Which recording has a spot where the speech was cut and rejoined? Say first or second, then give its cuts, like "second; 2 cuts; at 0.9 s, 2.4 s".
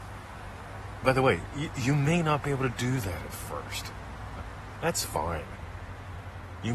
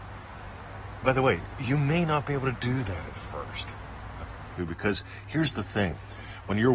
second; 2 cuts; at 1.5 s, 4.6 s